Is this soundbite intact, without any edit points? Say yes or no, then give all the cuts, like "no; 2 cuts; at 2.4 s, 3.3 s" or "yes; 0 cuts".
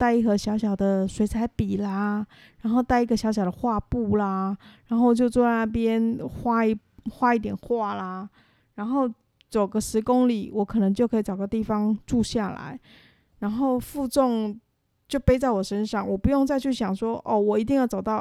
yes; 0 cuts